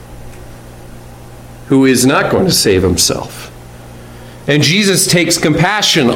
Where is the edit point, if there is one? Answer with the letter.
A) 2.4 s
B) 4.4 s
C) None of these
C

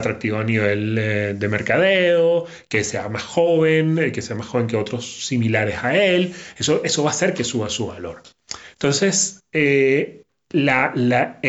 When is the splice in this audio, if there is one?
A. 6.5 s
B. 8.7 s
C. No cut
C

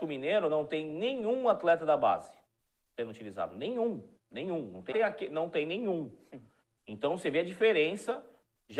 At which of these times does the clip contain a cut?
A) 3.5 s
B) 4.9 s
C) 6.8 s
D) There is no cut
B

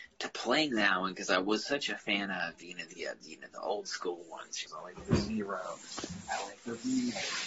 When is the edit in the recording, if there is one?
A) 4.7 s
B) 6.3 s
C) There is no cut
A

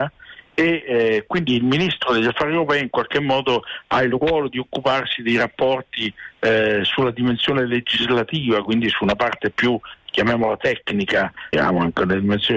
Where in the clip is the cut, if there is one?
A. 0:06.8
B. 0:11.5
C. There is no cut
B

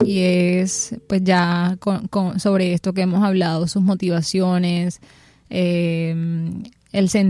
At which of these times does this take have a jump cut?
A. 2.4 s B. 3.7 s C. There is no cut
C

